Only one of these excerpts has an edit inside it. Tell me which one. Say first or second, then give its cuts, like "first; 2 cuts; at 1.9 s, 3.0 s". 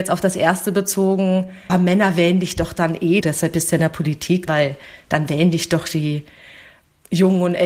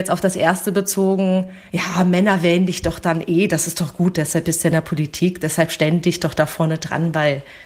first; 3 cuts; at 1.7 s, 3.2 s, 4.5 s